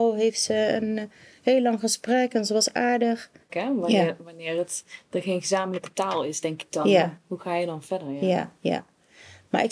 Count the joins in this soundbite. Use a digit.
1